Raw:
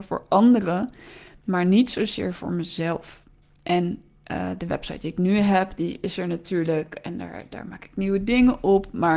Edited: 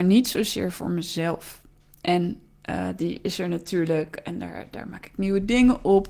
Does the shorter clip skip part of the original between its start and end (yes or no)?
yes